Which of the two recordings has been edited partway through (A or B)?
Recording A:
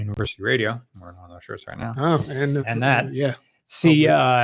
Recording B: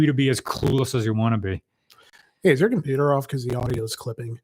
A